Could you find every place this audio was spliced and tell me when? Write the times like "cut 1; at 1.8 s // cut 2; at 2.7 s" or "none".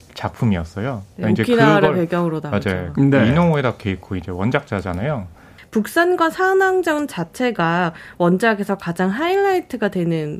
cut 1; at 2.9 s // cut 2; at 5.6 s